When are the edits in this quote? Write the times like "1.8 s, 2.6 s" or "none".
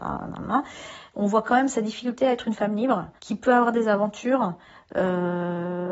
3.2 s